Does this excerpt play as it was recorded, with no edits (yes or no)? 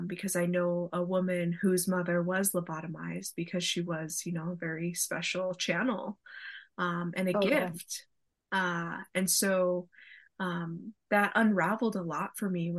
yes